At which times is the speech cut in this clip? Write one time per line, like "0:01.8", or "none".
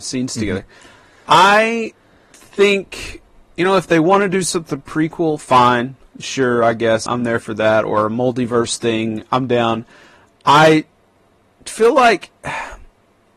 0:07.1